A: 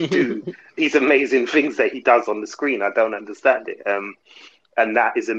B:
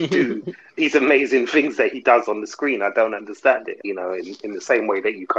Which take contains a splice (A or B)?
B